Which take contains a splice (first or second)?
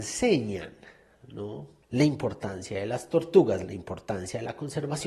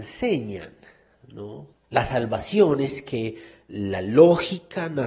second